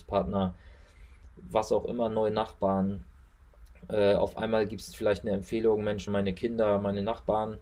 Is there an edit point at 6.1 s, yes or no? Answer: yes